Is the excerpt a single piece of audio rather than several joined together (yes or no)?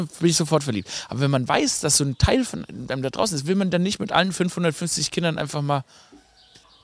yes